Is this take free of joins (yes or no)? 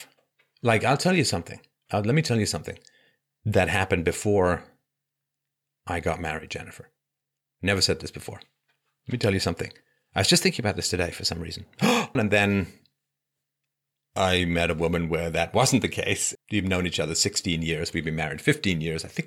no